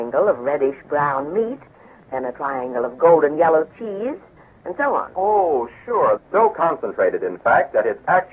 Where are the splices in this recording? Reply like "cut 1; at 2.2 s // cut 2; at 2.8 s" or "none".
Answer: cut 1; at 6.2 s